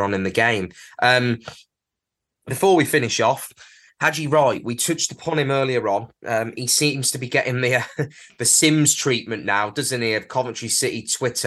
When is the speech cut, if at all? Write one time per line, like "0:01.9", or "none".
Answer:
none